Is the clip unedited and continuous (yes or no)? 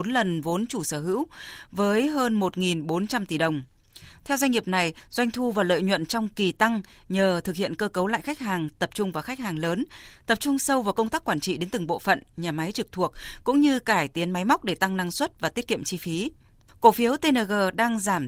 yes